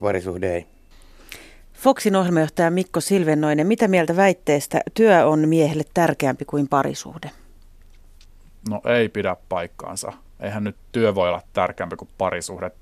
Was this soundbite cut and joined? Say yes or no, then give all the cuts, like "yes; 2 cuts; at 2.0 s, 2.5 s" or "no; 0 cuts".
no; 0 cuts